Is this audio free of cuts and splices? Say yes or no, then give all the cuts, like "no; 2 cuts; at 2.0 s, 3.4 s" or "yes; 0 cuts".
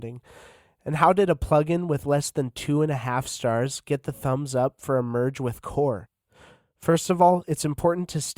yes; 0 cuts